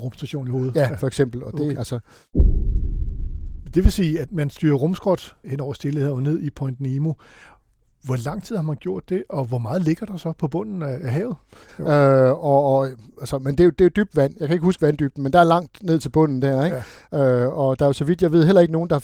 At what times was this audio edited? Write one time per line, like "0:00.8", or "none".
0:01.7
0:11.7